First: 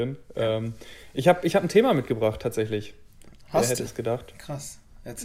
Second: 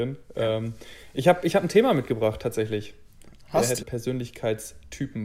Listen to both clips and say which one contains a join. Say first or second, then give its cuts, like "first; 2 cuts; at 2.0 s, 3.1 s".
second; 1 cut; at 3.8 s